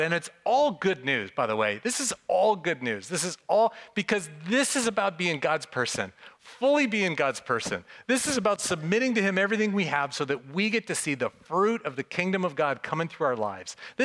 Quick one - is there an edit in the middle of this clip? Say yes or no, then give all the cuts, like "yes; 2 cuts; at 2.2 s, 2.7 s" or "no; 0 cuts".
no; 0 cuts